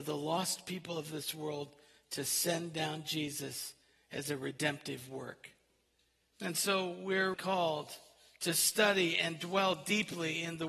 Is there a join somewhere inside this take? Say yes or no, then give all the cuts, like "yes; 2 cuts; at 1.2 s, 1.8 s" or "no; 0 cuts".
yes; 2 cuts; at 6.3 s, 7.3 s